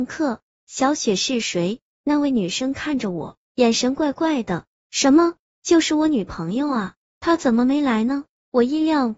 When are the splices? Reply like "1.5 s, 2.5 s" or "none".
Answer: none